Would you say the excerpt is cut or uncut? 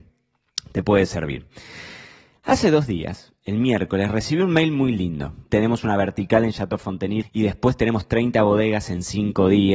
cut